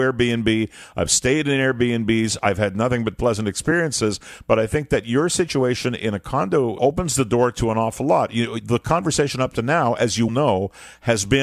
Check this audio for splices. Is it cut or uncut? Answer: cut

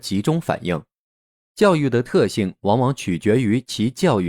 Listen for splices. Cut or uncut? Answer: uncut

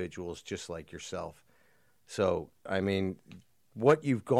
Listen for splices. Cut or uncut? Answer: cut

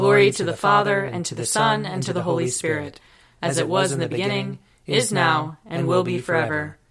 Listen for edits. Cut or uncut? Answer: uncut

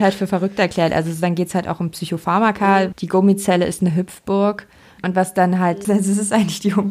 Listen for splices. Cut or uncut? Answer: cut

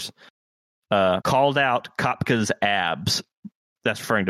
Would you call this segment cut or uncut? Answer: cut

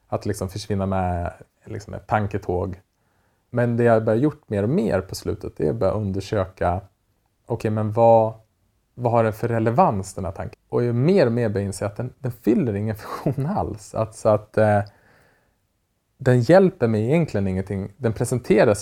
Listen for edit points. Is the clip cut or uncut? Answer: cut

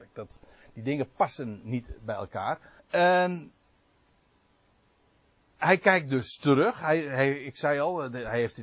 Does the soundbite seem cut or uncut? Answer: cut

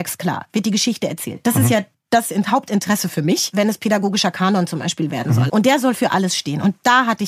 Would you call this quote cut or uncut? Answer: cut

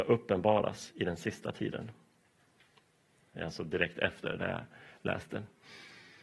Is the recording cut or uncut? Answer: uncut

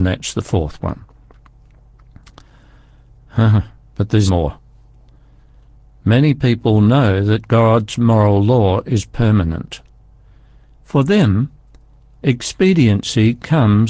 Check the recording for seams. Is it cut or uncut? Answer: cut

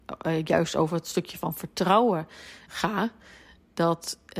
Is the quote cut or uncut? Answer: cut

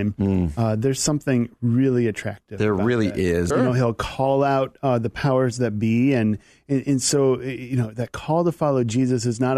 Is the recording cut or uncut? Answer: cut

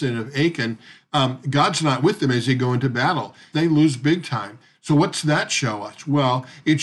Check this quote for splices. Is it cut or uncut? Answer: cut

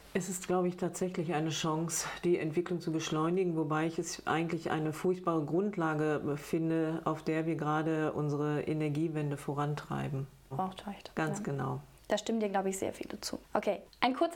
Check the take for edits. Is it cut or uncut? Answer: cut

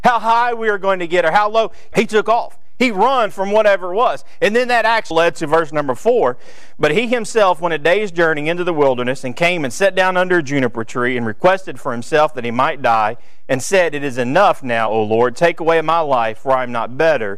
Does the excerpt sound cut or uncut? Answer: cut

